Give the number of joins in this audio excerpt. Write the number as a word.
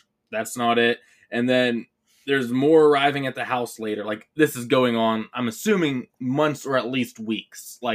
one